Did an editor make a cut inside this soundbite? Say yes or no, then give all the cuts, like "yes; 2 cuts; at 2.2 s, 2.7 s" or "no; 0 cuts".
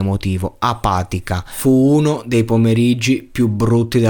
no; 0 cuts